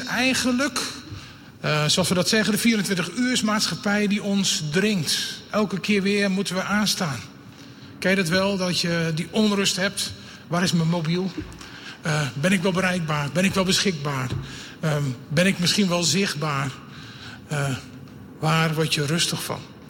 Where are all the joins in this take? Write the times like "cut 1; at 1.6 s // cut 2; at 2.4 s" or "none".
none